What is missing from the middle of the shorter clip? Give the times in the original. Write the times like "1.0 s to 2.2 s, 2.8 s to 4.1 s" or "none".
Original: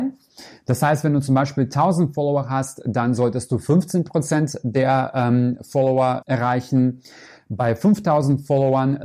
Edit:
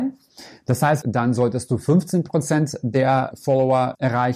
1.0 s to 2.8 s, 5.1 s to 5.6 s